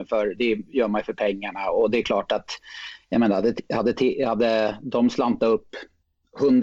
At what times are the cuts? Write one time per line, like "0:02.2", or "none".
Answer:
none